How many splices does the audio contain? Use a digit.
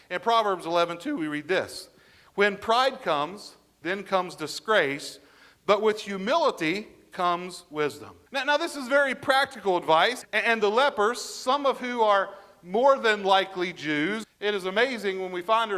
3